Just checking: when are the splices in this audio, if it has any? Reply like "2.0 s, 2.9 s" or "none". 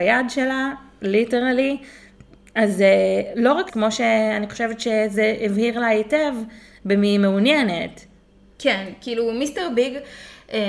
3.7 s

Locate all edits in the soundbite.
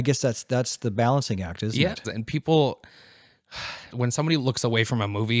2.0 s, 3.9 s

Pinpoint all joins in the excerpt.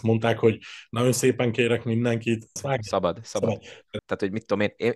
2.6 s, 4.0 s

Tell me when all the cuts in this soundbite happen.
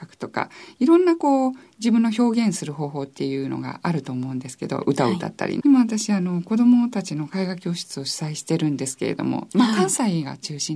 5.6 s

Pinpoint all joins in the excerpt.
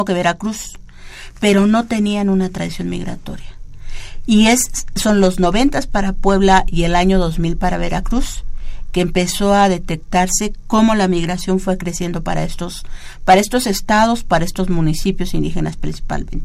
none

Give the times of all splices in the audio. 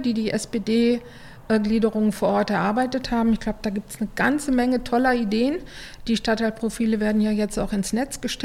none

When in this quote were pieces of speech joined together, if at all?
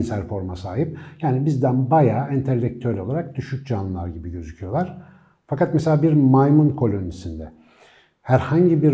none

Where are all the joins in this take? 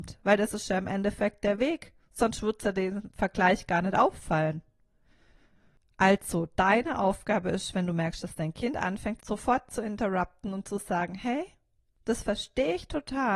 9.2 s

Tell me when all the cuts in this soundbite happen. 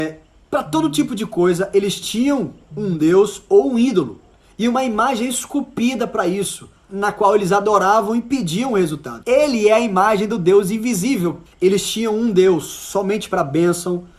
6.9 s, 9.2 s, 11.5 s

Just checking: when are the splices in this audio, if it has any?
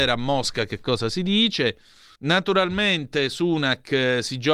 2.2 s

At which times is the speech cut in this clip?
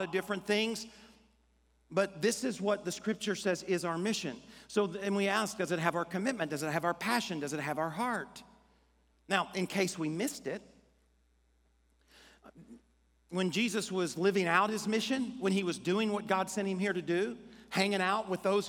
none

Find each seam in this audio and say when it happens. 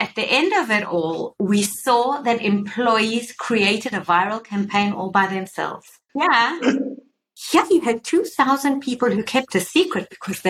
6.1 s

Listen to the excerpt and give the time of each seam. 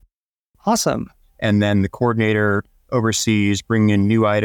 1.2 s

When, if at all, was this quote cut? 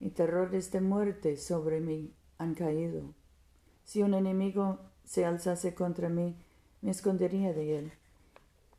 3.7 s

